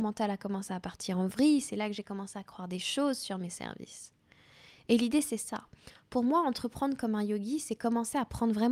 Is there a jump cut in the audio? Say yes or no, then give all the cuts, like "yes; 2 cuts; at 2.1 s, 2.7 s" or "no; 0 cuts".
no; 0 cuts